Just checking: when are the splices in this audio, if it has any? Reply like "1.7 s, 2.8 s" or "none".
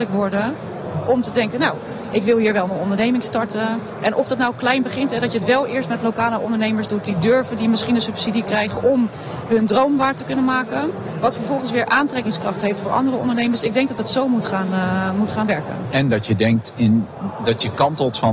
none